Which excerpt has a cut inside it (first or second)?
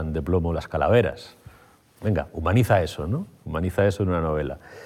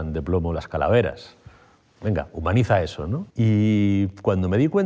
second